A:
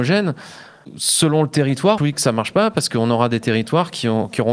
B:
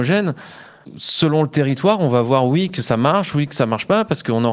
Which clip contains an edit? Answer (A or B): A